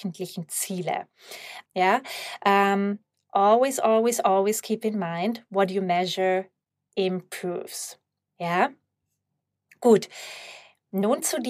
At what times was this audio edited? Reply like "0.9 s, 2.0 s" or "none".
1.7 s